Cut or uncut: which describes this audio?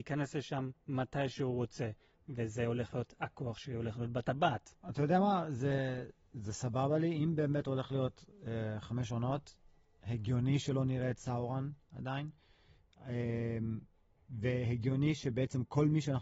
uncut